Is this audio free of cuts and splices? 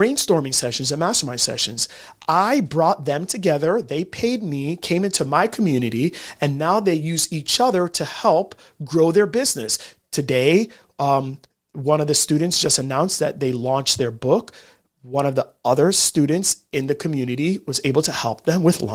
yes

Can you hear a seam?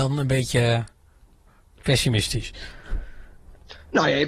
no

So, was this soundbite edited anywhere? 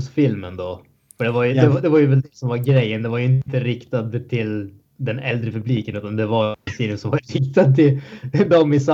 no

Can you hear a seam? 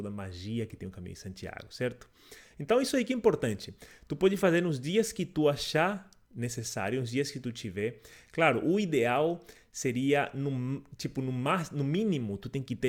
no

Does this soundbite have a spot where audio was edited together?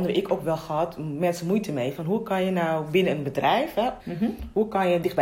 yes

